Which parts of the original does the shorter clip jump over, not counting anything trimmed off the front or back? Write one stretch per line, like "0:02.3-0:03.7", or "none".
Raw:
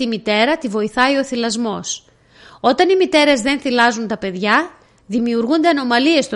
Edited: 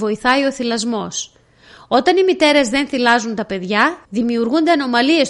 0:04.8-0:05.0